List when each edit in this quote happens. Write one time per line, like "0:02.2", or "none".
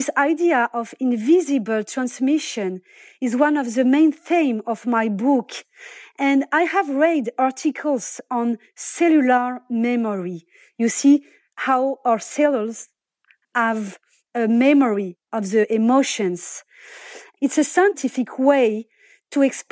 none